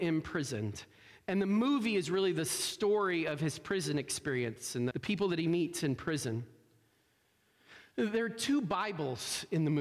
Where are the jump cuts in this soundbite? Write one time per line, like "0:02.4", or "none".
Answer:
0:04.9